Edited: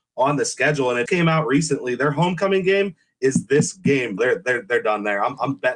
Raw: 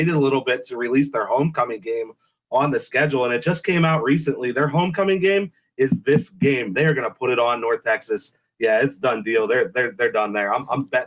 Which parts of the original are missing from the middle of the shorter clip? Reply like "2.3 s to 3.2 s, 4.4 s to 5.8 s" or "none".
3.4 s to 3.6 s, 6.7 s to 9.5 s